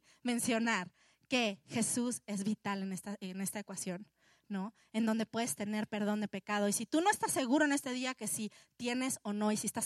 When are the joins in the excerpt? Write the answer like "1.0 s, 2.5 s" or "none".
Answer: none